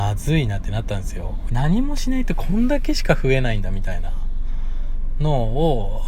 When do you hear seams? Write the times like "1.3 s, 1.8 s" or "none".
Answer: 1.5 s